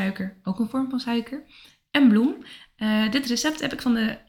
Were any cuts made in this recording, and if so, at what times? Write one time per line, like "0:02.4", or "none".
none